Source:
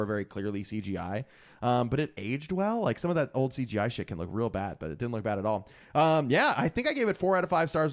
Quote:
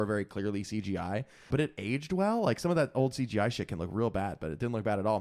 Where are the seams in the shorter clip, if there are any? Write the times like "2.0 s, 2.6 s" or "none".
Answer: 1.5 s